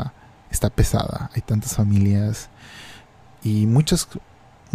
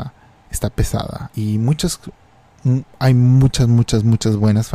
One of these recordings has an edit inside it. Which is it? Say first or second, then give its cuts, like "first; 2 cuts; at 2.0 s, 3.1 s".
second; 1 cut; at 1.3 s